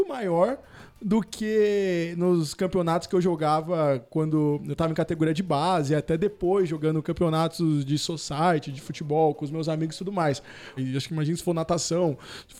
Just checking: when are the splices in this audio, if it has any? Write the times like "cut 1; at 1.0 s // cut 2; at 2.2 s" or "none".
cut 1; at 10.8 s